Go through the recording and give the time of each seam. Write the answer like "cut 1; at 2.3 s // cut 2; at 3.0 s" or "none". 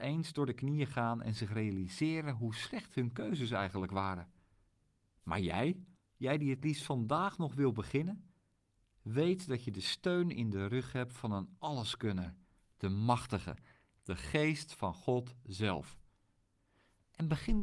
cut 1; at 6.0 s